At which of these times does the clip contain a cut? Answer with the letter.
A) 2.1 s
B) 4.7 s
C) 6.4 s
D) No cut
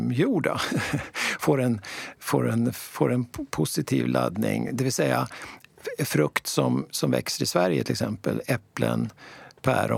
D